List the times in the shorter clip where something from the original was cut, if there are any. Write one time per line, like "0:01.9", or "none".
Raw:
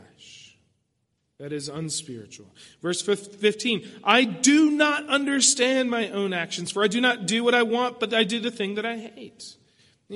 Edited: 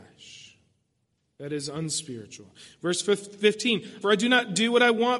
0:04.0